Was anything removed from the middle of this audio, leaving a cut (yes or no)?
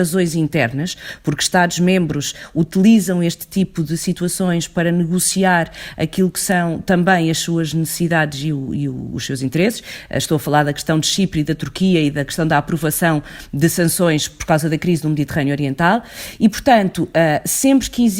no